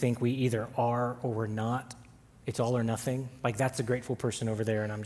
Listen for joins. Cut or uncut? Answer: uncut